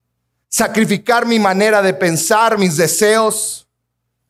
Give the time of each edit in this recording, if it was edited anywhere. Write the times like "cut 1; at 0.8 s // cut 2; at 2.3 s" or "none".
none